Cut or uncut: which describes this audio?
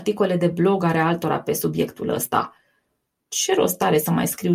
uncut